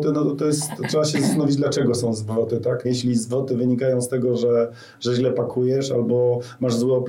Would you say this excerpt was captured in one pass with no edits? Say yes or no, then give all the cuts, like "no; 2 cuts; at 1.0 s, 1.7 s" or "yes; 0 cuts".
no; 1 cut; at 2.8 s